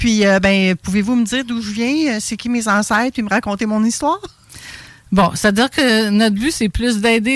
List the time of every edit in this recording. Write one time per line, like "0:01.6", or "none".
none